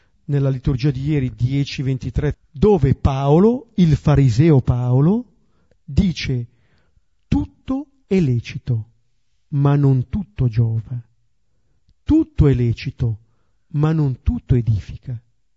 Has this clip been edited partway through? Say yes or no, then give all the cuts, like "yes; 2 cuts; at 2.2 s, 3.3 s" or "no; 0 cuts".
yes; 1 cut; at 2.3 s